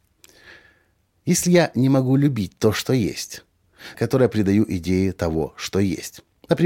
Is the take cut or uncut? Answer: cut